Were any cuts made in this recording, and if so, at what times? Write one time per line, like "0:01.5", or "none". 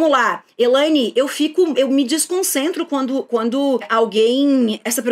none